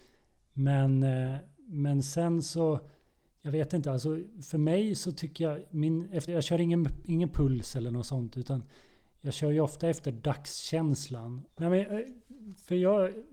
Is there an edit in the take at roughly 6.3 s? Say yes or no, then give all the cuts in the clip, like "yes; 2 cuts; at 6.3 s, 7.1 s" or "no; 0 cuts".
yes; 2 cuts; at 6.3 s, 11.5 s